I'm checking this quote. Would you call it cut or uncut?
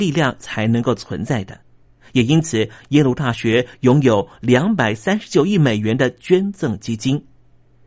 uncut